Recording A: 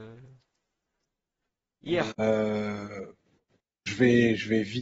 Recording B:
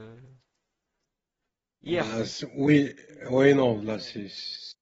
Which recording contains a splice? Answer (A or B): A